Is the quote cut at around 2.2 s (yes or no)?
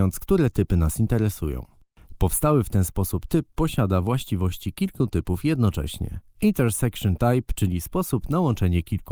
no